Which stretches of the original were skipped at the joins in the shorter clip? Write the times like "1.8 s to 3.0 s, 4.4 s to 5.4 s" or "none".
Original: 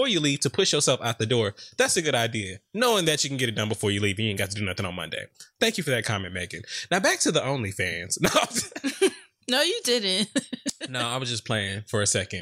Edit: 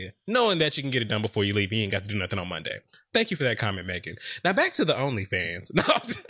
none